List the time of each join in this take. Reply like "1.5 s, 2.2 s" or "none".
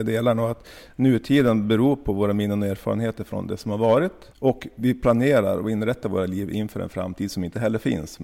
4.3 s